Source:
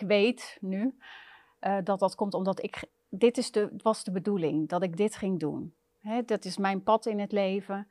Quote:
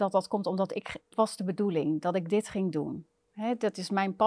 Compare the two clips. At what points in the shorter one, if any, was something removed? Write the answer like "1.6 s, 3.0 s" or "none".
1.1 s